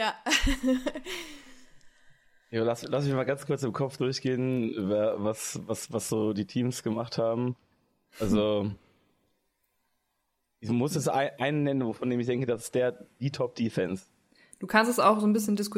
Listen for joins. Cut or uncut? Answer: uncut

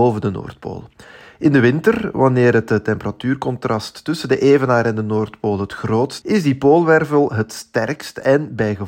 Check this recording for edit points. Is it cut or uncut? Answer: cut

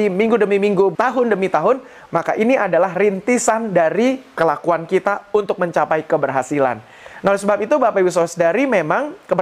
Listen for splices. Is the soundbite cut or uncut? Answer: cut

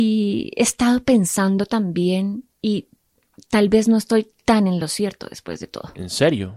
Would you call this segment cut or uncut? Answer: uncut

